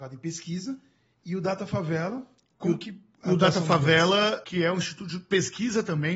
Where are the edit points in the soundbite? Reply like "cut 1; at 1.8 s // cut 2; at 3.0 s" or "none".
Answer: cut 1; at 4.4 s